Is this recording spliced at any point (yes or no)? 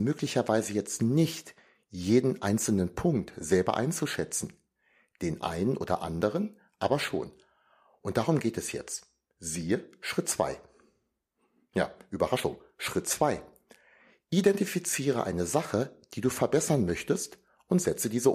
no